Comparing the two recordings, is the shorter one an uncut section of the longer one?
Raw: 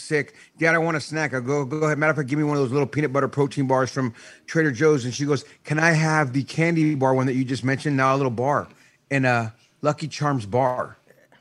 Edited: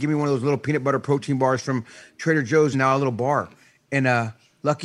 no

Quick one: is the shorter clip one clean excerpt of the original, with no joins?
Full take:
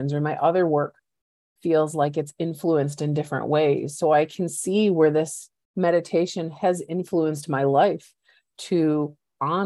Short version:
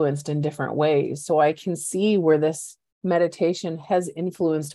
yes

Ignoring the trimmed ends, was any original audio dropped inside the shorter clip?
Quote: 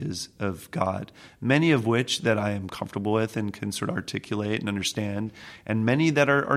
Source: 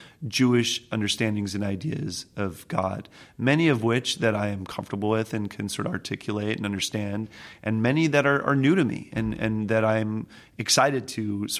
no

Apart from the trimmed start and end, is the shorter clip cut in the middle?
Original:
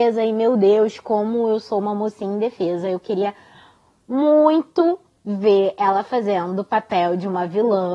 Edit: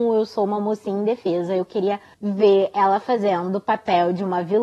yes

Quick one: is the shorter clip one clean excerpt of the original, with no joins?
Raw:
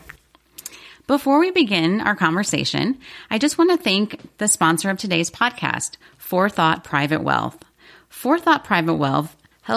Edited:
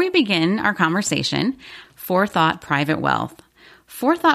no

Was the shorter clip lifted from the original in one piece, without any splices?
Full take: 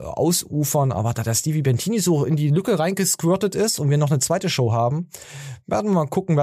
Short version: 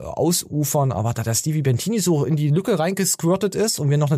yes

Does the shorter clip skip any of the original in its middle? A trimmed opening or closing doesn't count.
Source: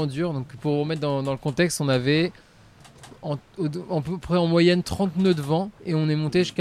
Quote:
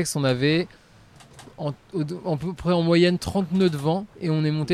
no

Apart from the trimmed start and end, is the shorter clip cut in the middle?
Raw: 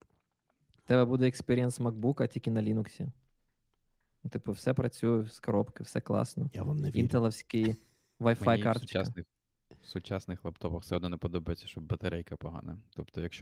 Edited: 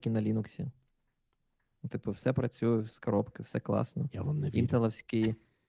no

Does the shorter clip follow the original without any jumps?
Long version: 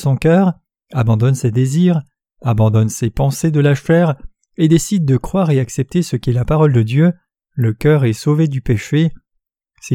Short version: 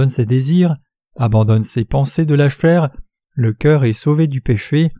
no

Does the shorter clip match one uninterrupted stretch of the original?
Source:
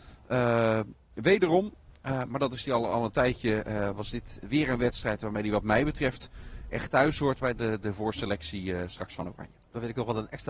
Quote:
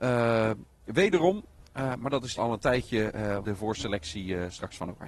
no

